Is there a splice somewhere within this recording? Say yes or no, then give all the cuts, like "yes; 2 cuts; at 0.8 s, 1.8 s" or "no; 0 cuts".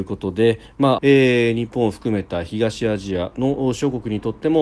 yes; 1 cut; at 1.0 s